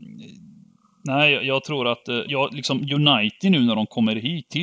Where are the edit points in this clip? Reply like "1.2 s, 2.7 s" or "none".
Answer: 2.3 s